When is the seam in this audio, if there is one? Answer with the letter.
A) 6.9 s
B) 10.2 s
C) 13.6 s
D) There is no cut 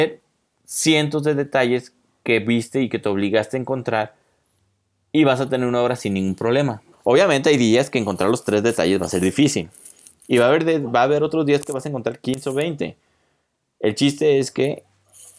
A